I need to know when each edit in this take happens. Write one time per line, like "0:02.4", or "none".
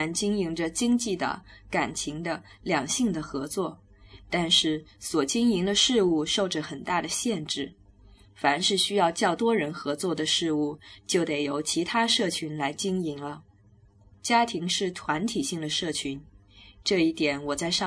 0:14.1